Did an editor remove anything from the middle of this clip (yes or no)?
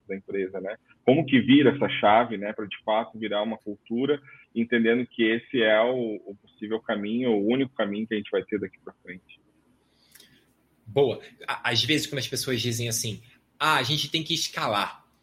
no